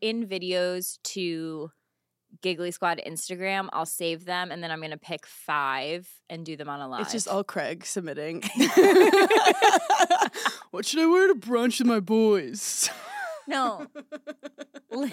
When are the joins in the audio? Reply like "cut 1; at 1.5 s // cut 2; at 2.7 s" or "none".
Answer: cut 1; at 5.2 s